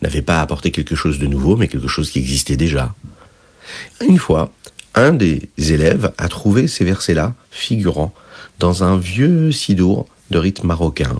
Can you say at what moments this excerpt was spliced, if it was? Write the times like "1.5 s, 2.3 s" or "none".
3.9 s